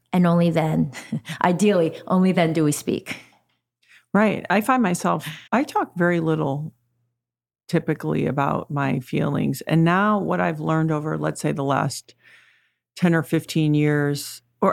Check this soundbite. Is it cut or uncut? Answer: cut